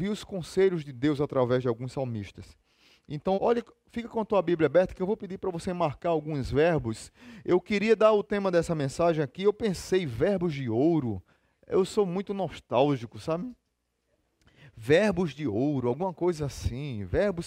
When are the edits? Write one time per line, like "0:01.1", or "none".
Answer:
0:03.3